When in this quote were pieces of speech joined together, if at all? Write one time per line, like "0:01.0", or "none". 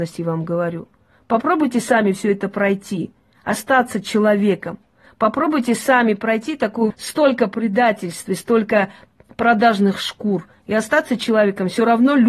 0:06.9